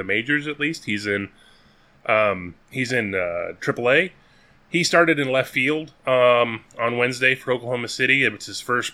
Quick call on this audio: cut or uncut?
uncut